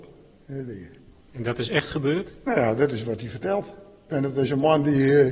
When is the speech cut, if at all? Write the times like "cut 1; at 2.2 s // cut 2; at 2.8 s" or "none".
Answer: cut 1; at 4.1 s